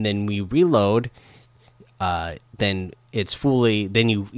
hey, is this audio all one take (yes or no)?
yes